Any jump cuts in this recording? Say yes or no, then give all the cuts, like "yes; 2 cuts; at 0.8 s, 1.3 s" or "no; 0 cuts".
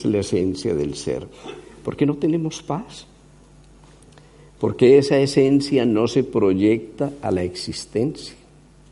no; 0 cuts